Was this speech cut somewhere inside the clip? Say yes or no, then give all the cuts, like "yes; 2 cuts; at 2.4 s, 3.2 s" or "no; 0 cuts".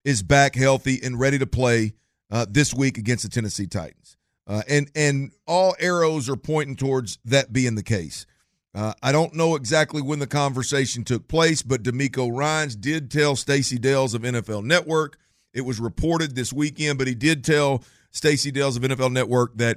yes; 1 cut; at 5.4 s